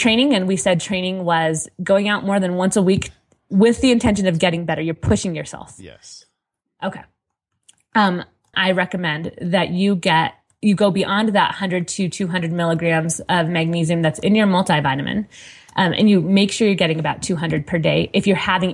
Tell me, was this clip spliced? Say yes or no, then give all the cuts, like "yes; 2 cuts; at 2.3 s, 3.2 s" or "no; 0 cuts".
yes; 1 cut; at 8.5 s